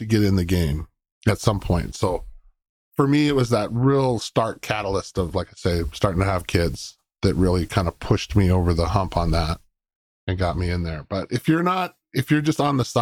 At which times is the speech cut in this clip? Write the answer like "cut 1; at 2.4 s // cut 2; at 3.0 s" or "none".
none